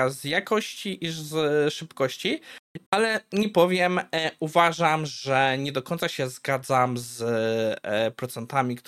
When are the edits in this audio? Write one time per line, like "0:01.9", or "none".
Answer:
0:02.9